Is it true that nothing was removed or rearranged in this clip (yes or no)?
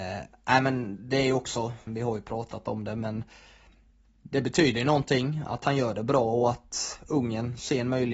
no